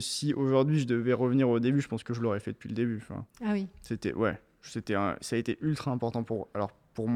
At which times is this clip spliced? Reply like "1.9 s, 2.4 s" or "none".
none